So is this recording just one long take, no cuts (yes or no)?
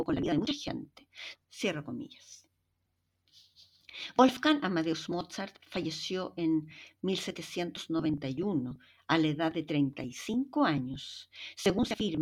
no